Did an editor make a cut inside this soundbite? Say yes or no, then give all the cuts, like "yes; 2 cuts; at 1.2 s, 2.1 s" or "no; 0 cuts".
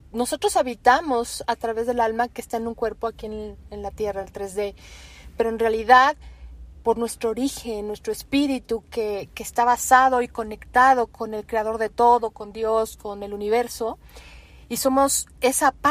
no; 0 cuts